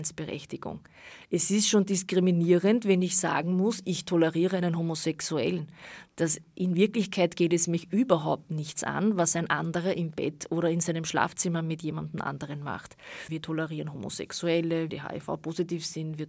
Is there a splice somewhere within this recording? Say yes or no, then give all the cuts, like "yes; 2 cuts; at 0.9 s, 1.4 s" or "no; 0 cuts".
yes; 2 cuts; at 13.3 s, 14.9 s